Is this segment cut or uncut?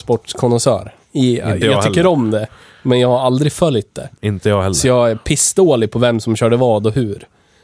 cut